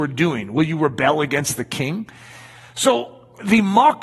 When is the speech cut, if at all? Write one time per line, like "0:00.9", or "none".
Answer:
none